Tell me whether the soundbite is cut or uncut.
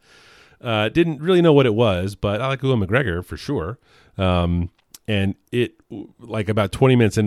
uncut